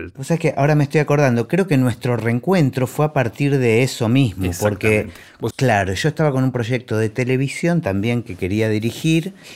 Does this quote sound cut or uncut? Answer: cut